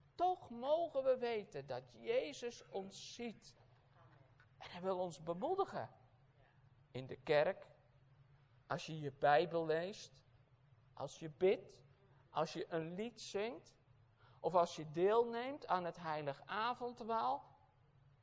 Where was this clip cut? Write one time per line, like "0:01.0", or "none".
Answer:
none